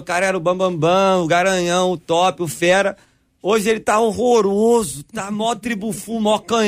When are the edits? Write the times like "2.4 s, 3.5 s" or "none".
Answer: none